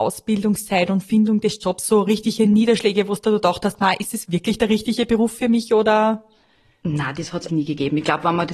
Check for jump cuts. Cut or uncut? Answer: cut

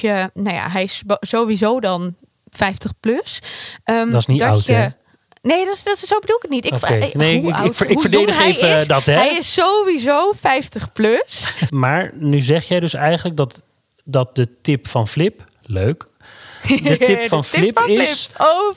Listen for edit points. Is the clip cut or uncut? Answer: cut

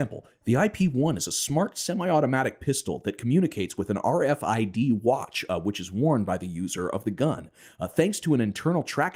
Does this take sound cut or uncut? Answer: uncut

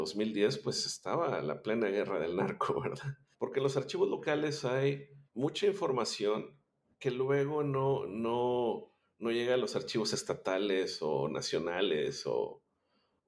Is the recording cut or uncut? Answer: cut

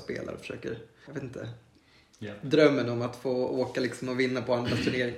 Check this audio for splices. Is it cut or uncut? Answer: cut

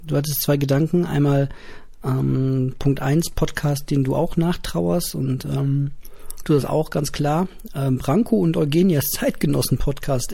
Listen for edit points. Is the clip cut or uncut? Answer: uncut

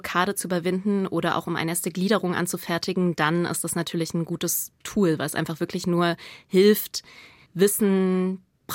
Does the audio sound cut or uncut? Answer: uncut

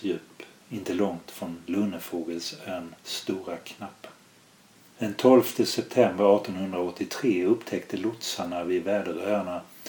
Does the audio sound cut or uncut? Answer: cut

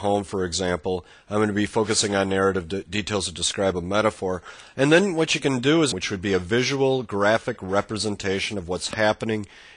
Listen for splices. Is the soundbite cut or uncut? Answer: cut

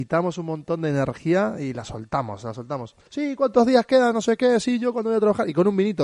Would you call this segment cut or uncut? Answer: cut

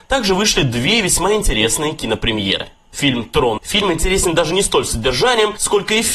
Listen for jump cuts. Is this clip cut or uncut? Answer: cut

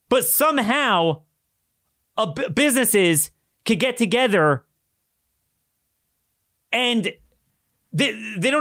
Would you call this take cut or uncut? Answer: uncut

